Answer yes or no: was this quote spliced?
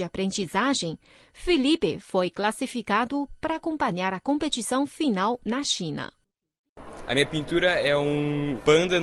no